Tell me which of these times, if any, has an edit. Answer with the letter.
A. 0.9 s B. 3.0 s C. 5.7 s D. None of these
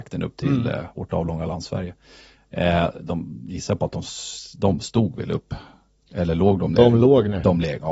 B